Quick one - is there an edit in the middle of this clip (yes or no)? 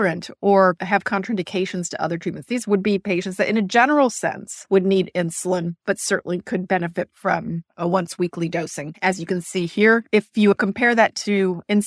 yes